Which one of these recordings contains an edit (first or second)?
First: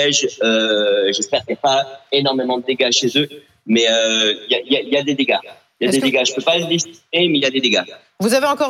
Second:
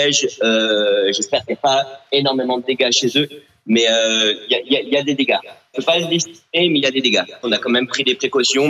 second